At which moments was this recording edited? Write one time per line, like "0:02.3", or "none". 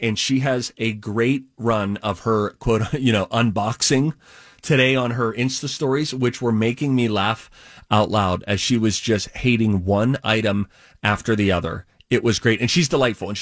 none

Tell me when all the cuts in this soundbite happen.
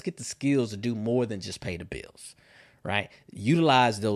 none

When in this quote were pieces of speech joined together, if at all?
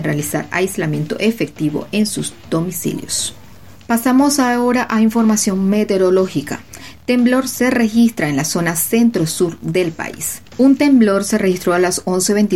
0:10.5

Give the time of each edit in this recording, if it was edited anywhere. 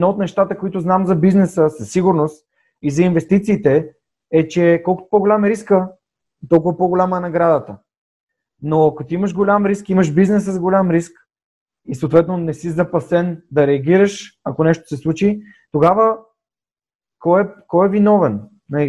none

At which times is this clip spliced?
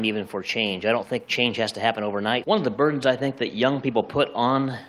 0:02.4

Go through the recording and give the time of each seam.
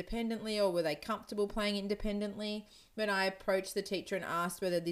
0:02.9

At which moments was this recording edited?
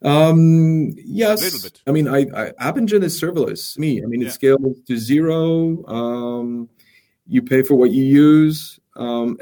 0:01.9
0:03.8

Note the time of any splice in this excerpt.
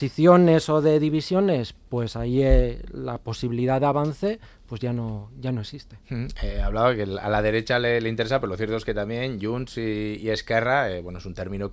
none

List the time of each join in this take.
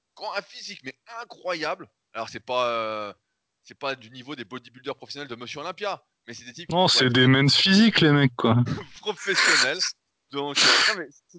0:08.7

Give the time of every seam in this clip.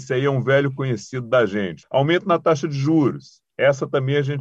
0:01.8

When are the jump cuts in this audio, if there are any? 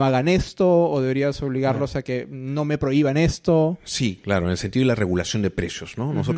none

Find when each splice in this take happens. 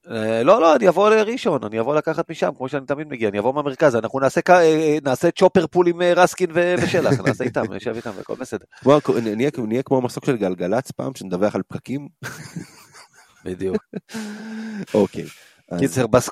none

